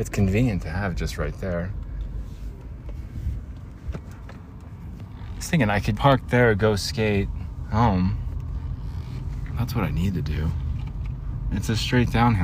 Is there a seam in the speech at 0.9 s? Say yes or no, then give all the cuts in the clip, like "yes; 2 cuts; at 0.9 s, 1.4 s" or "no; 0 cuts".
no; 2 cuts; at 5.9 s, 11.5 s